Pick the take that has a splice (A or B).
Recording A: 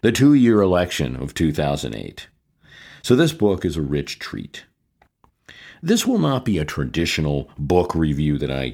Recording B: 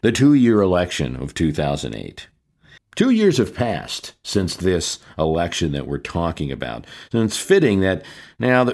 B